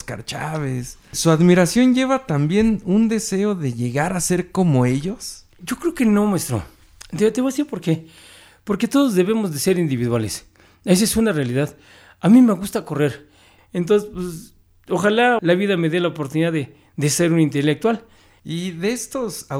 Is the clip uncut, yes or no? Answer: no